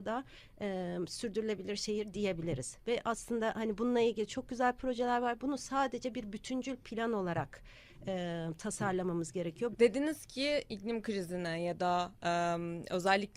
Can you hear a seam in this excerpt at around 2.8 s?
no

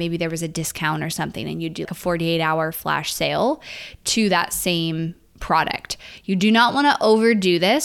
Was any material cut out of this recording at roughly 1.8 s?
yes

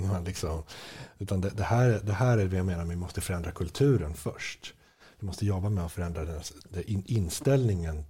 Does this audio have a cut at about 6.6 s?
yes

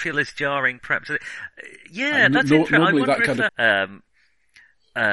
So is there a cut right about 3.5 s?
yes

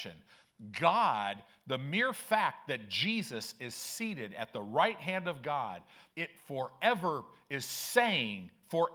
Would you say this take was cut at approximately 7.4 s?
no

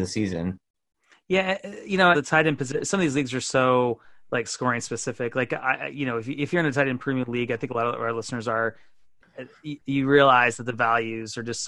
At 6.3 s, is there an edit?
no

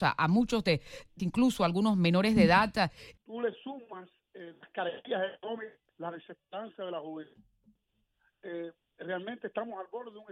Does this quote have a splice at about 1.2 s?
yes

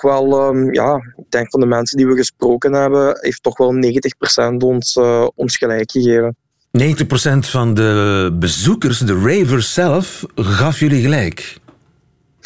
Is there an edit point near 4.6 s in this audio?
no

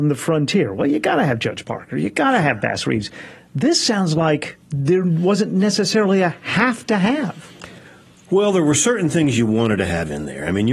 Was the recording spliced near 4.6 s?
yes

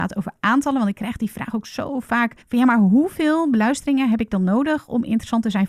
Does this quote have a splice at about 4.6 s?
no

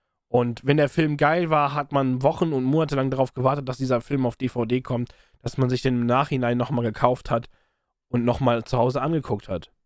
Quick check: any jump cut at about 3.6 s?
no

